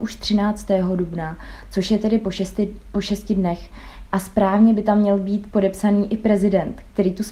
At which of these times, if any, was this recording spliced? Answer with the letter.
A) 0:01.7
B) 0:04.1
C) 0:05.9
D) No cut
B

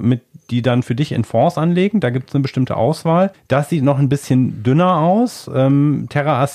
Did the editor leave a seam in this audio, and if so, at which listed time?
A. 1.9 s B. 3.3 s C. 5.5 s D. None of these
B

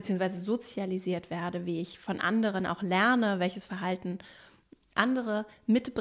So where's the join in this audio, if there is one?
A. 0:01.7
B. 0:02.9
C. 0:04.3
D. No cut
D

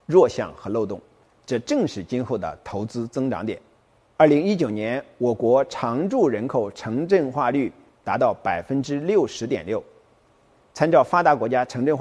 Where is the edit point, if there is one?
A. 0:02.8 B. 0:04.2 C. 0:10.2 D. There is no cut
B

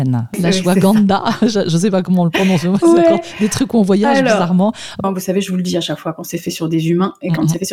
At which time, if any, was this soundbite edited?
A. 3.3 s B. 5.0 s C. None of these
B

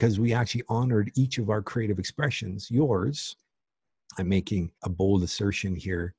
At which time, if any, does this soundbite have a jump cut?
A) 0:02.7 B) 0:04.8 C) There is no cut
B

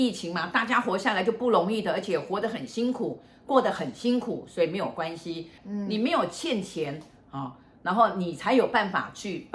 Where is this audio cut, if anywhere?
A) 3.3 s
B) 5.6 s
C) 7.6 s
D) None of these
B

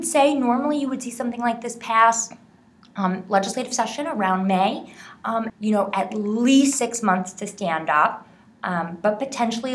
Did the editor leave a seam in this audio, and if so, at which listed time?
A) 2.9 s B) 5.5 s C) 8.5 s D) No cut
B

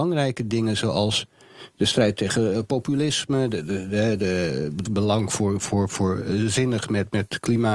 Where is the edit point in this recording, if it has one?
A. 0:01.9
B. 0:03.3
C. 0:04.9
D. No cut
C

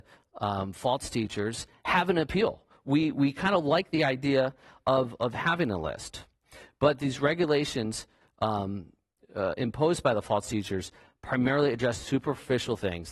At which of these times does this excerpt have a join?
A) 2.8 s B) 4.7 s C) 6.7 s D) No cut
D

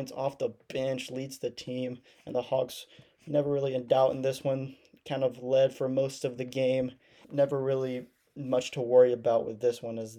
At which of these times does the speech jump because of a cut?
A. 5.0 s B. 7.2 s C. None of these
B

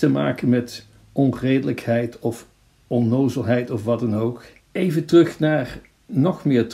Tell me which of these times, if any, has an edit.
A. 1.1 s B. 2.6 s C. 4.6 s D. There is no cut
C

